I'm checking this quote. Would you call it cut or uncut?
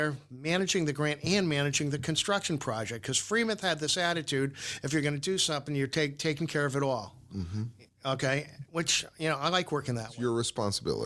uncut